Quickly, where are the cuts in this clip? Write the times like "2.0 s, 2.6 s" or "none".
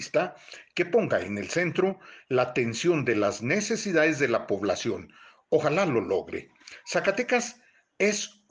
none